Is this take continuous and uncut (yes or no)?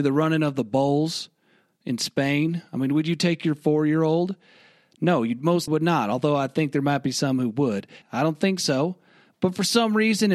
no